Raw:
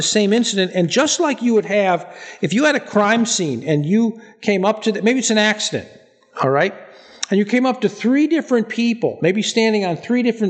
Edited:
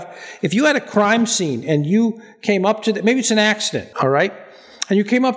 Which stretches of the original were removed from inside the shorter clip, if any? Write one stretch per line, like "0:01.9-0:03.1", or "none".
0:05.9-0:06.3